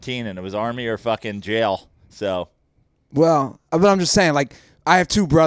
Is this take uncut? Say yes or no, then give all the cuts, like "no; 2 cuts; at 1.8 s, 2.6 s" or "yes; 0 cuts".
yes; 0 cuts